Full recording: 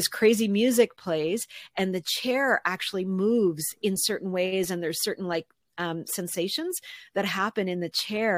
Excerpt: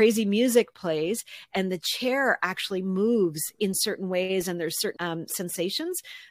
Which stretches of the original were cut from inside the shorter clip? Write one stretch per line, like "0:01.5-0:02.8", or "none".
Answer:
0:05.2-0:05.7